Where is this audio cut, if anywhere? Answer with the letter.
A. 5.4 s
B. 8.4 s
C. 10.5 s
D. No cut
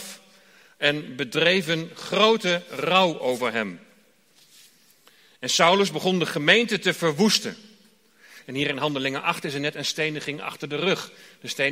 B